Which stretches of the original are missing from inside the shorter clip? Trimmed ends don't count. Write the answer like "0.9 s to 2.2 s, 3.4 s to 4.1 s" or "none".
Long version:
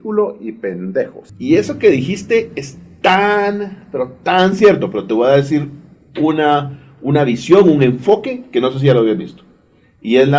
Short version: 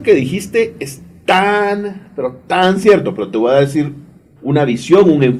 6.1 s to 7.0 s